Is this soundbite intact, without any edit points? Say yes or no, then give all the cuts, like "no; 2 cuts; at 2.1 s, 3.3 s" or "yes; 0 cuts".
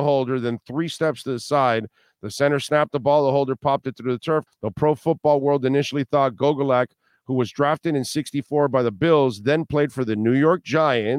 no; 1 cut; at 4.5 s